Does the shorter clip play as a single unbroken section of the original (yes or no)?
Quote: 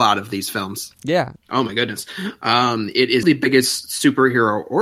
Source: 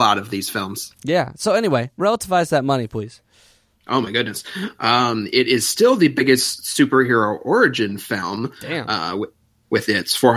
no